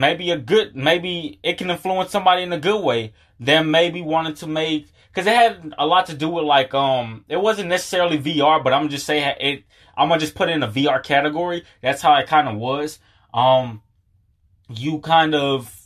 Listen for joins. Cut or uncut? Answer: uncut